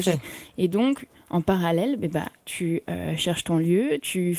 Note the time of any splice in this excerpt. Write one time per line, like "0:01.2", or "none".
none